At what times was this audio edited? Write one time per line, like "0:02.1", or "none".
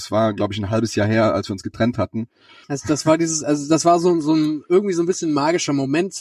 0:02.6